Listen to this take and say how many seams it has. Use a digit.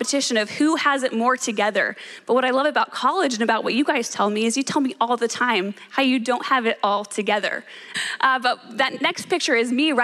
1